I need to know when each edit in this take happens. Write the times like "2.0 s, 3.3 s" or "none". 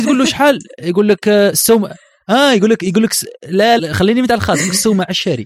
3.8 s